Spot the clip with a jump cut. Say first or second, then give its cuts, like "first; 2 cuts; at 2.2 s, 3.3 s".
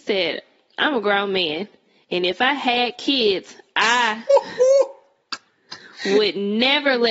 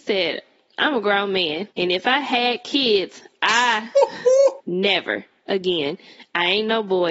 second; 2 cuts; at 1.7 s, 4.6 s